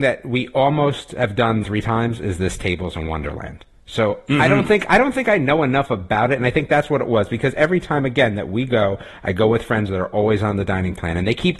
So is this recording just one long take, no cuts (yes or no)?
no